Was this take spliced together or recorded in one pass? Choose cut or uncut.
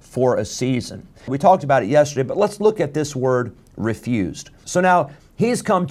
cut